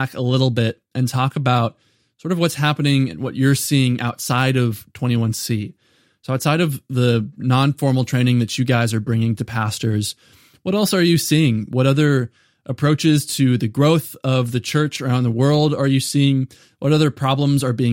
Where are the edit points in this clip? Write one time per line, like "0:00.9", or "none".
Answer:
none